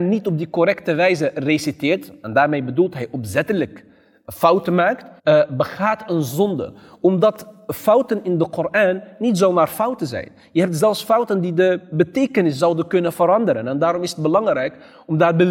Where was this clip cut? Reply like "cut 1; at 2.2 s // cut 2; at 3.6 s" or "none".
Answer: cut 1; at 5.2 s